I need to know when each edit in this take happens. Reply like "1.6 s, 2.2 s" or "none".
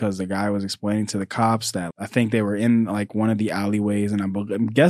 1.9 s